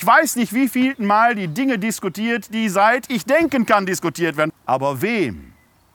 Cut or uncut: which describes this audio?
cut